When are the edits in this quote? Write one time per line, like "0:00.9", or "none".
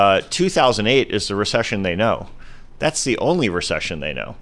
none